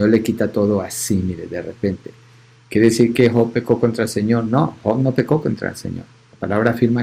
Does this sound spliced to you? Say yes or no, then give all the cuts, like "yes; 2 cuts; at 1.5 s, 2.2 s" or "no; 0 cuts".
no; 0 cuts